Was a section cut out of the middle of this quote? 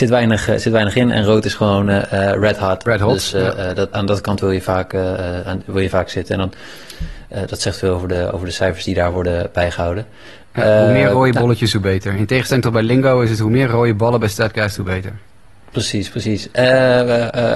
yes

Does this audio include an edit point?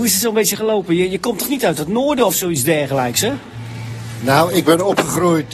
no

